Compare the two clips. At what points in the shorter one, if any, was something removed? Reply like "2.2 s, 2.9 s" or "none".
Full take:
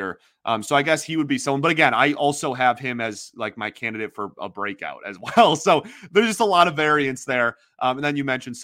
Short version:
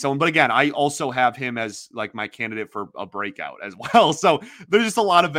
none